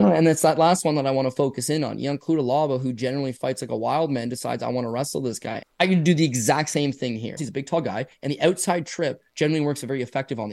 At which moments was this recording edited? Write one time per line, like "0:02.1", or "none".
0:05.6
0:07.4